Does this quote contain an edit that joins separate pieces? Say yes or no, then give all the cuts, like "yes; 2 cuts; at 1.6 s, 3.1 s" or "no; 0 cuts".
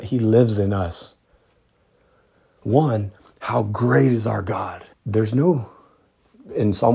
yes; 1 cut; at 4.9 s